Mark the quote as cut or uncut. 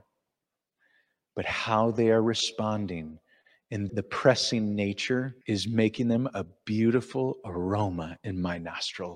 cut